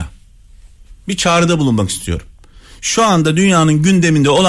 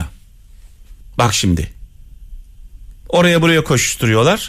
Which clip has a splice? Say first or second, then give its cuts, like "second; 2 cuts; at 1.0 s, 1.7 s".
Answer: second; 1 cut; at 1.0 s